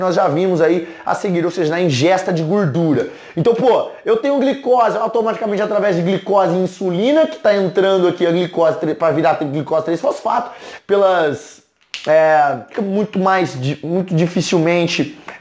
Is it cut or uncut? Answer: cut